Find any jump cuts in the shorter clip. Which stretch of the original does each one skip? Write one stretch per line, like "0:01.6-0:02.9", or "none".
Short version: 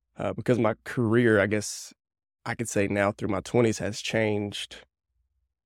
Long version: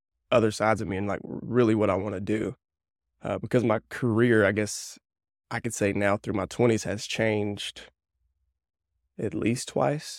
none

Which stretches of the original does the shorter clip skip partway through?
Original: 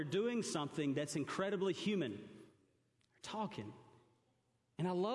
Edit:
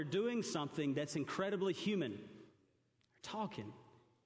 none

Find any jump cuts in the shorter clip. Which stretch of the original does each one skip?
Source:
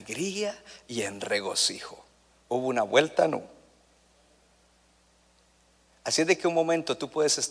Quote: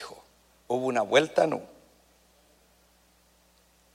none

